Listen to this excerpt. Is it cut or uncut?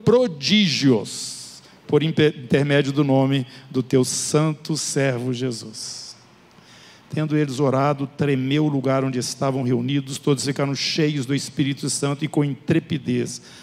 uncut